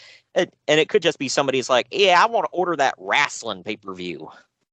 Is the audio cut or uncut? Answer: uncut